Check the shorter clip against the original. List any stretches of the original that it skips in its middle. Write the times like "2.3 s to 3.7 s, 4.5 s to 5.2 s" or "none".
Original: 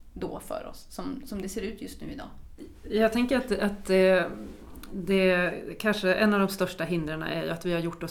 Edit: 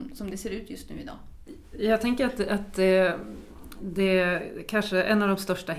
none